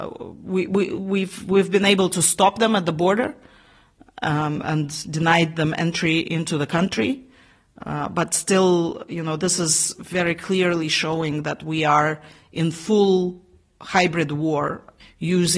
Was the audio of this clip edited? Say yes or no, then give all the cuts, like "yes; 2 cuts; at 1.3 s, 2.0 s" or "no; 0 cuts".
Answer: no; 0 cuts